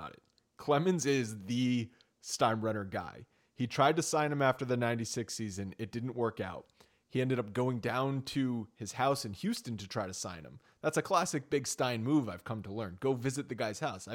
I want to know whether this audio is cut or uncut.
uncut